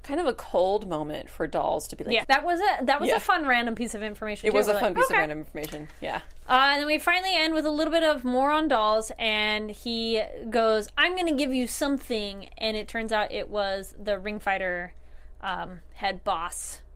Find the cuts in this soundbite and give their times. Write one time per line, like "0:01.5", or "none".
0:02.2